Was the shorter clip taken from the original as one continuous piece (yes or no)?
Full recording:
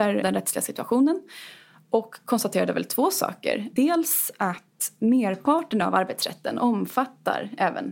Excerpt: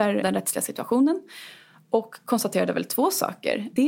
yes